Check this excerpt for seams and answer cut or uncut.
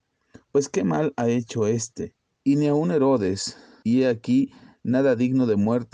cut